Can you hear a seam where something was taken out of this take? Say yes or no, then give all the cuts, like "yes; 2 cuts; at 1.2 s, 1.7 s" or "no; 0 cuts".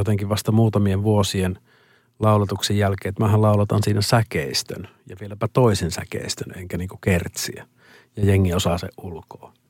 no; 0 cuts